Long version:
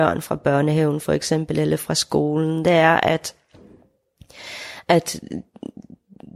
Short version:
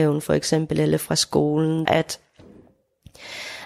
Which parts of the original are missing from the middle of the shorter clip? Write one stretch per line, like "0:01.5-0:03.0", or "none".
0:02.6-0:03.0